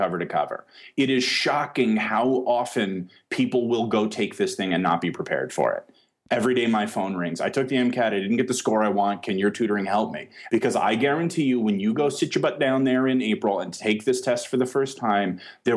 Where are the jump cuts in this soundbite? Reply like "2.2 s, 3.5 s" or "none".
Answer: 10.5 s